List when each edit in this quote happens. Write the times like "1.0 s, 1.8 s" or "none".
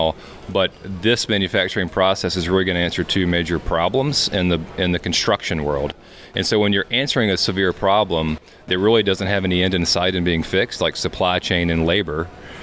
none